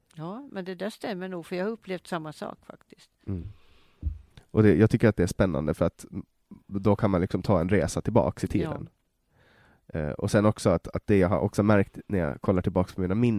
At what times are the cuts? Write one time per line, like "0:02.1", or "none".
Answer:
none